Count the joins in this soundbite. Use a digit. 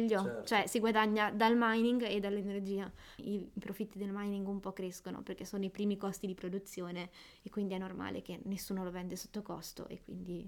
1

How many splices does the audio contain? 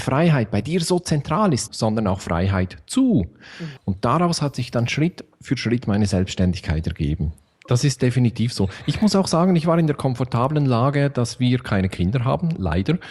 3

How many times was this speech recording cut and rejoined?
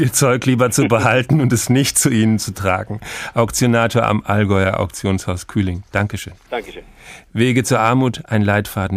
0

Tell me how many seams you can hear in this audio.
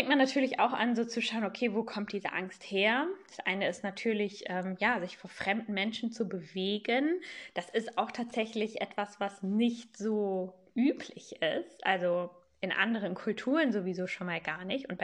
0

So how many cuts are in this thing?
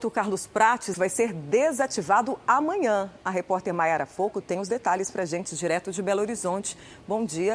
1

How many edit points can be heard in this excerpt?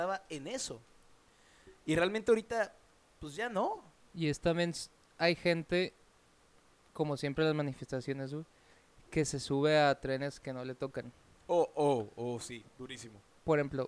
1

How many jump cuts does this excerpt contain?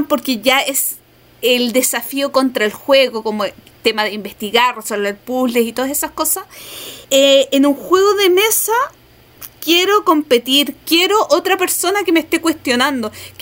2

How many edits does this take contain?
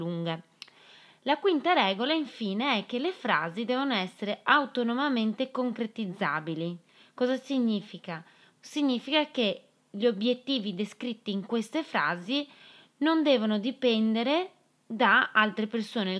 0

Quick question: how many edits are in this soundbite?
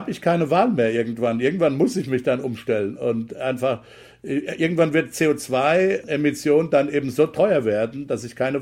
0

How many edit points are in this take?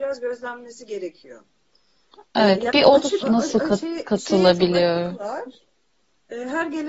1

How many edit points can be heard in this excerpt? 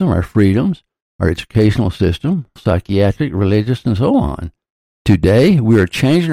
2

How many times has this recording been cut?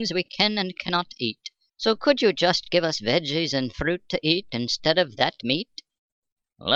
1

